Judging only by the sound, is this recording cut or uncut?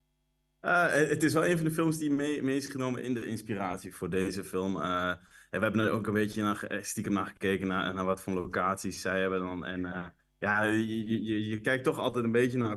uncut